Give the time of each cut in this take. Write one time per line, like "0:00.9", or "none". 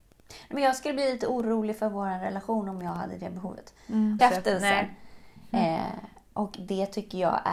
0:04.2